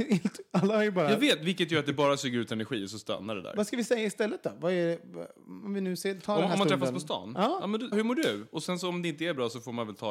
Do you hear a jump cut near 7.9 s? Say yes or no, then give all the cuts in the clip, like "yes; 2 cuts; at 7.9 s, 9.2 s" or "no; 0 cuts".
yes; 1 cut; at 7.9 s